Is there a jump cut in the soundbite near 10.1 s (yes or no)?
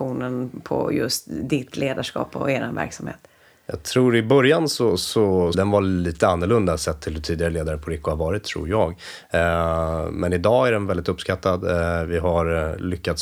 no